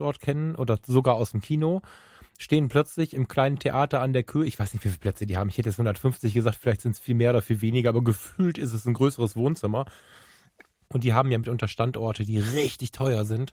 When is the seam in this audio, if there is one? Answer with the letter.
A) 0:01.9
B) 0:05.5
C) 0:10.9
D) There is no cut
C